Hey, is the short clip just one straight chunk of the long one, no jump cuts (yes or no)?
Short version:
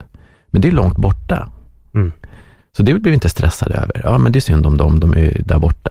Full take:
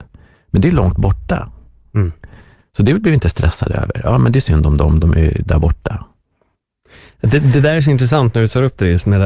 yes